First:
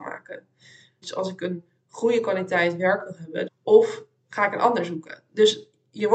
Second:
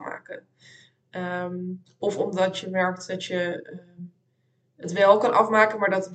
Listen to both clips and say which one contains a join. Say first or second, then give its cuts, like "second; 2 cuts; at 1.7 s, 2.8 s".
first; 2 cuts; at 1.0 s, 3.5 s